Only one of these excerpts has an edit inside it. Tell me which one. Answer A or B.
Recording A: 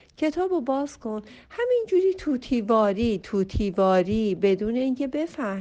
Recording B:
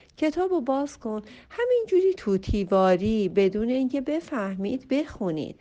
B